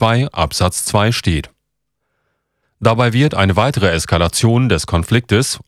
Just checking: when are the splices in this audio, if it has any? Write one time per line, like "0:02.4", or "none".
0:02.6